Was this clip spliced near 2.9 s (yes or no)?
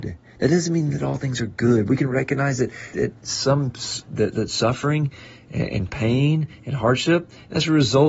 yes